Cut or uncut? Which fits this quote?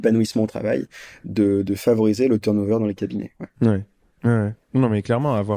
uncut